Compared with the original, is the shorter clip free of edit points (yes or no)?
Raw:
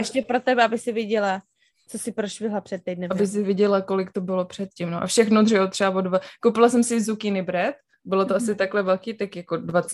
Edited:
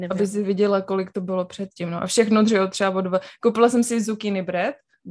yes